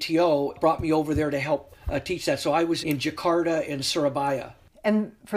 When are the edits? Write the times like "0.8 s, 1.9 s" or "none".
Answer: 2.8 s